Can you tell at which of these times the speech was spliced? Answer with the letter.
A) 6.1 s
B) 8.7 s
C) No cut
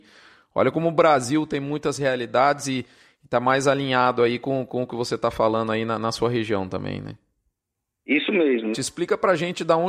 B